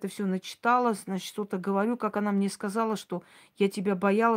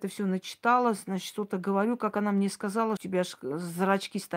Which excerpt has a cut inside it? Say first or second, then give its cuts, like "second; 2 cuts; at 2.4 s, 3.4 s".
second; 1 cut; at 3.0 s